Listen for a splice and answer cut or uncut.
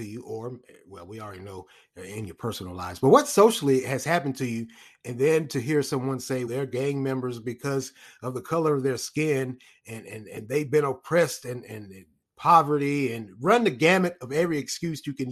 cut